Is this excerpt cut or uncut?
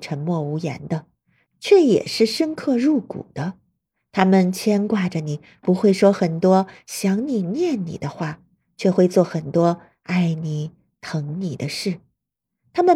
uncut